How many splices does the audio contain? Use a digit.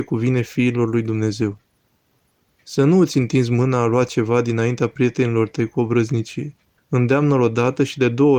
1